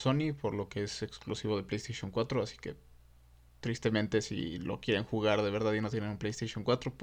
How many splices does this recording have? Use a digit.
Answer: 0